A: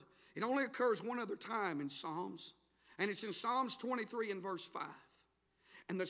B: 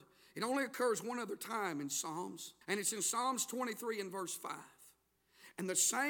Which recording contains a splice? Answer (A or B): B